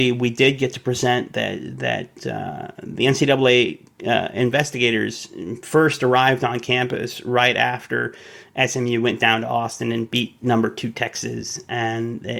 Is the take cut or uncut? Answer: uncut